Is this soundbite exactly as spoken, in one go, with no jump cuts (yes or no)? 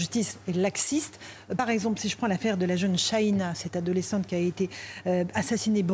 yes